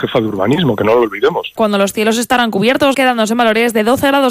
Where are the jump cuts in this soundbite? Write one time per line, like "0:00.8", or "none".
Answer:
0:01.6
0:02.9